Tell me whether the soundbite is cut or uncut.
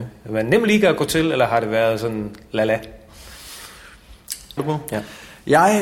cut